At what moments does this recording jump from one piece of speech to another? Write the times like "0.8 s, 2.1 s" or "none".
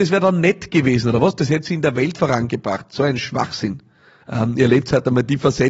4.2 s

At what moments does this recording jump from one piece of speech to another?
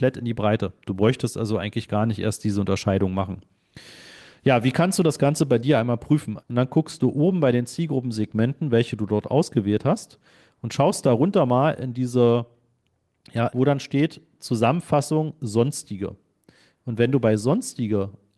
6.4 s, 13.5 s

